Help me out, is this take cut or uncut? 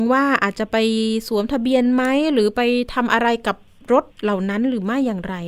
cut